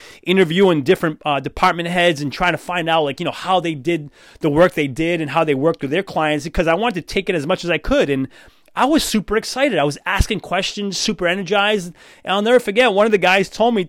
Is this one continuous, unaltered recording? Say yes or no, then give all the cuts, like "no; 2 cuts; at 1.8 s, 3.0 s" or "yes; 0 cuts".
yes; 0 cuts